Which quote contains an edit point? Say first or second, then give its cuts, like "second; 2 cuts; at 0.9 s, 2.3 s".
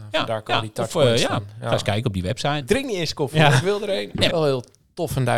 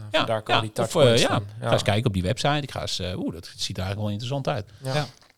first; 2 cuts; at 2.6 s, 4.3 s